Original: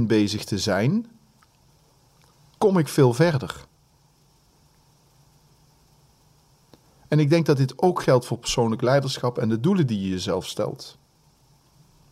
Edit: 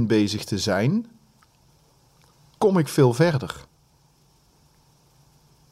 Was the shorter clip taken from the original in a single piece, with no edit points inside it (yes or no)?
yes